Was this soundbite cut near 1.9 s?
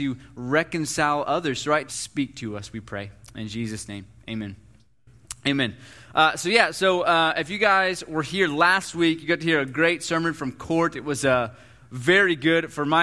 yes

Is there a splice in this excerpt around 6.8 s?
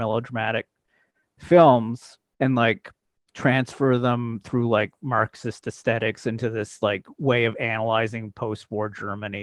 no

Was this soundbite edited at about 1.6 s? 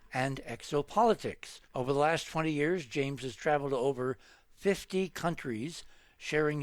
yes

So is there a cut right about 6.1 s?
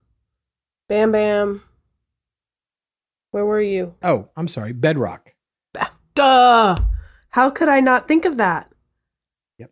no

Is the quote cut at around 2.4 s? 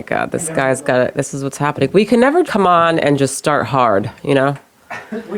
yes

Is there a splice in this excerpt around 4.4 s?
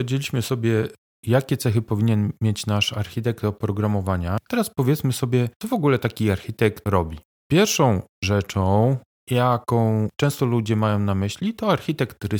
no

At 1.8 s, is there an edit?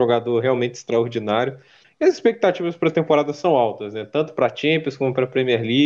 yes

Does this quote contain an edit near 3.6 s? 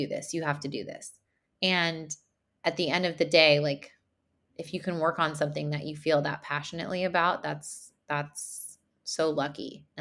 no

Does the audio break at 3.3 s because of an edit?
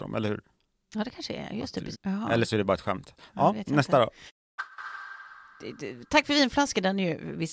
no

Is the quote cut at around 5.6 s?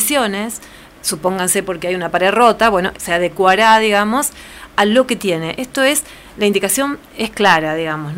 no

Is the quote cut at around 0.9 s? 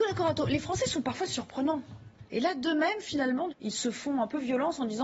no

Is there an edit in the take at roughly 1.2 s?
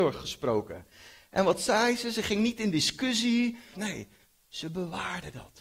no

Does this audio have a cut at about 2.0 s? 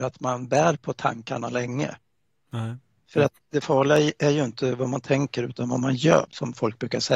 no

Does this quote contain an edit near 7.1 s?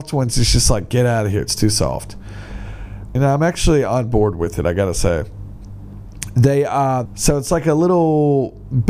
yes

